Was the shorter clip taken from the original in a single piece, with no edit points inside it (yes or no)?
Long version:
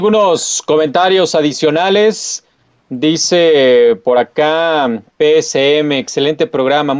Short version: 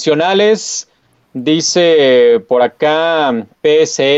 yes